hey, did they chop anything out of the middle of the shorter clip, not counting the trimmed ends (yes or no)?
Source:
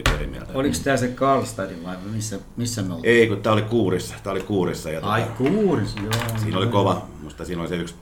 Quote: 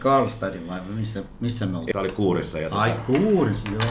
yes